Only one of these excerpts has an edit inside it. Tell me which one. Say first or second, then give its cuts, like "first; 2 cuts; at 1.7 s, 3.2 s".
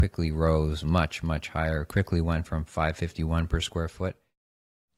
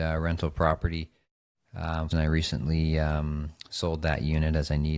second; 1 cut; at 2.1 s